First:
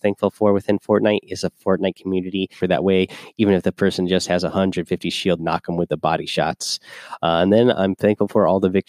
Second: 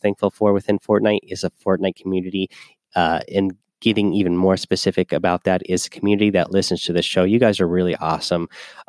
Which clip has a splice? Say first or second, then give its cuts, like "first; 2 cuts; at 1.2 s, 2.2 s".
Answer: first; 2 cuts; at 2.6 s, 5.4 s